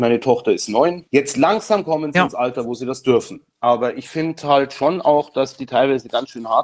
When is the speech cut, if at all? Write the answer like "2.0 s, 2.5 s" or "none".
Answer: 1.1 s